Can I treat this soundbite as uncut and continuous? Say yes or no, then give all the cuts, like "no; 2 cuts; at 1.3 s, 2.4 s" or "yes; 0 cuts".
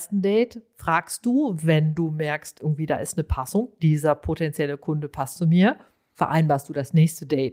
yes; 0 cuts